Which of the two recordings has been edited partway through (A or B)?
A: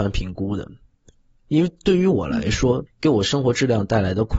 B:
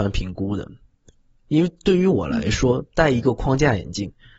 A